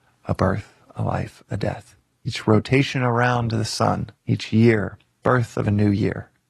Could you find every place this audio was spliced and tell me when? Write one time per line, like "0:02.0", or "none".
0:02.2
0:04.2